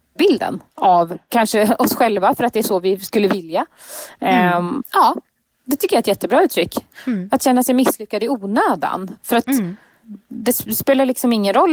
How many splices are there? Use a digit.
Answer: 1